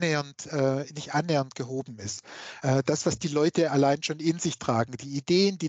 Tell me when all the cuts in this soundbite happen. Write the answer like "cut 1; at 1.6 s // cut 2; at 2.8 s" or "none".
none